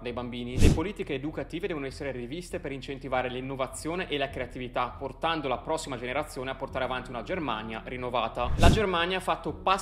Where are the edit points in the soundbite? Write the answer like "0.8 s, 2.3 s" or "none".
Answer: 8.5 s

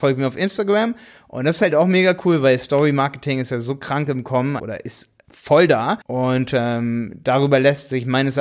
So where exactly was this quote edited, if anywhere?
4.6 s, 6.0 s

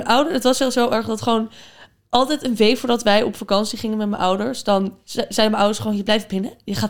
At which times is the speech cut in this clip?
none

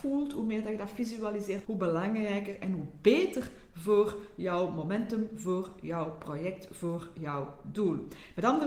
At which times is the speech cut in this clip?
1.6 s

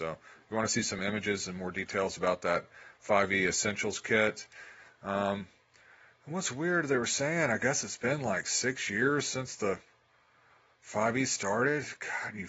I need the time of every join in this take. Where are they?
none

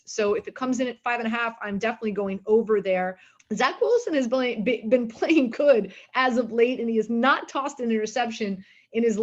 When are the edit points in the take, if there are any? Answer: 3.4 s, 5.5 s

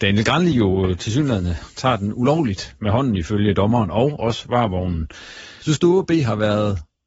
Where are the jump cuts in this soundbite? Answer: 5.6 s

